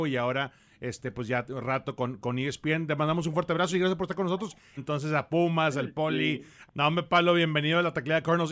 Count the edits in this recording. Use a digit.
2